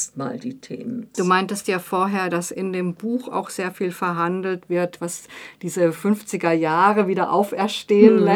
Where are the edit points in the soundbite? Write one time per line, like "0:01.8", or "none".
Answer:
0:01.1